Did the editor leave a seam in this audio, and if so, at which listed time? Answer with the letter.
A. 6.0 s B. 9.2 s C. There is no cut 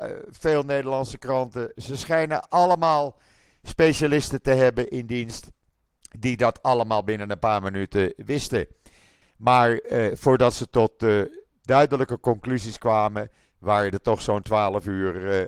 B